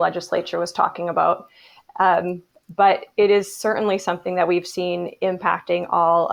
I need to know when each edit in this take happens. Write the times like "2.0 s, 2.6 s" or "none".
none